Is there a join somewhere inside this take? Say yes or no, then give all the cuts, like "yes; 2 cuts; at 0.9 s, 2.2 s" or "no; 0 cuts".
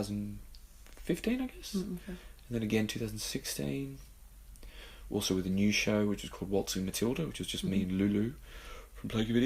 no; 0 cuts